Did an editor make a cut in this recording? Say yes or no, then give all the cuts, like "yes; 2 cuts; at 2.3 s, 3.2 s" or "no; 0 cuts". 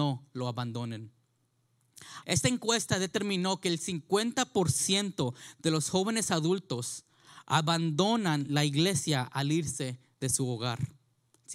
yes; 1 cut; at 2.2 s